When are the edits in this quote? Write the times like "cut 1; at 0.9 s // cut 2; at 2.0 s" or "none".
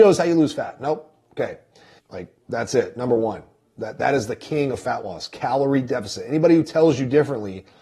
cut 1; at 2.0 s